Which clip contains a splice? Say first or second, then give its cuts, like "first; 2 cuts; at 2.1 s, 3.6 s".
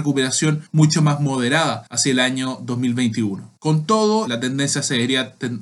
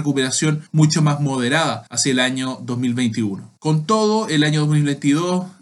first; 1 cut; at 4.3 s